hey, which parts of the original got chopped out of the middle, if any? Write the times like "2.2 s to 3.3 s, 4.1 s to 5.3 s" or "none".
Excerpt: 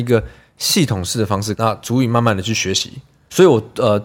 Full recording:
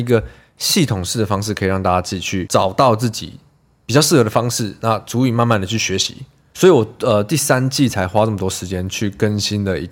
1.5 s to 4.8 s

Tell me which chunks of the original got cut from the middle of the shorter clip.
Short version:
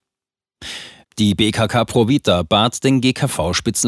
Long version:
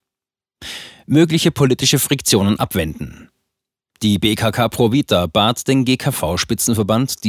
1.0 s to 3.9 s

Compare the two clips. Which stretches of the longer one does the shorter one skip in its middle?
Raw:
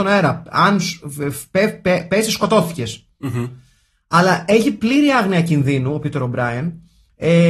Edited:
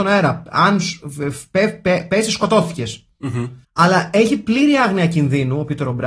3.6 s to 4.0 s

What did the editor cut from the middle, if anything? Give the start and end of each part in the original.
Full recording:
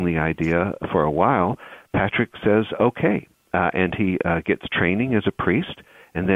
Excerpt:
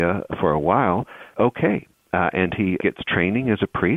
1.9 s to 2.8 s, 4.2 s to 4.4 s

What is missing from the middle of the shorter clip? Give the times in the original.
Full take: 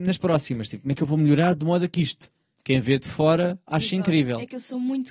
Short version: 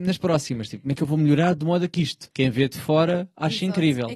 2.3 s to 2.6 s

